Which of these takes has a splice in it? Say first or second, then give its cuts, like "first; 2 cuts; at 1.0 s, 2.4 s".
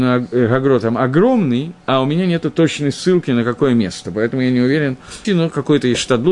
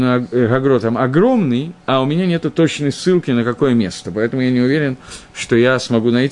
first; 1 cut; at 5.2 s